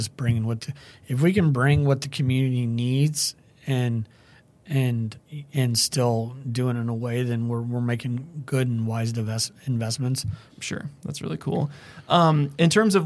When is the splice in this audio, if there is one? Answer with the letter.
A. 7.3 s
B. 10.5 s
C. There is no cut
B